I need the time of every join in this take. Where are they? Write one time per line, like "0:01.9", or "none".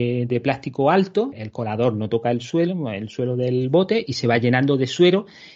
0:01.3